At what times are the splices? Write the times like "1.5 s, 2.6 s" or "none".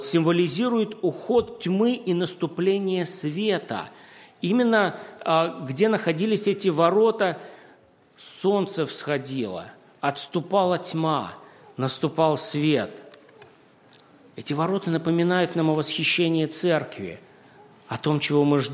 none